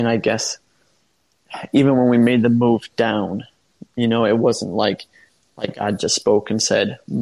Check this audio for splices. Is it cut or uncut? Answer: uncut